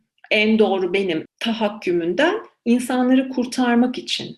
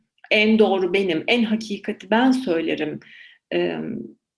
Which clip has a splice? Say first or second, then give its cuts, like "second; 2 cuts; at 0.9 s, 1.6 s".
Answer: first; 1 cut; at 1.3 s